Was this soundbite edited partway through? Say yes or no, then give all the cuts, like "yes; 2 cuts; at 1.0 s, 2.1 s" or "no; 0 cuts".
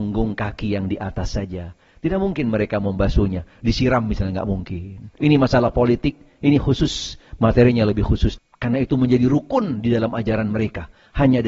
yes; 2 cuts; at 5.2 s, 8.4 s